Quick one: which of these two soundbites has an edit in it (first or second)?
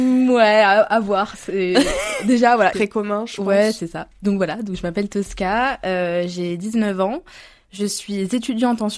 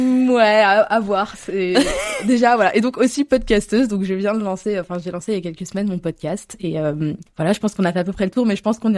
first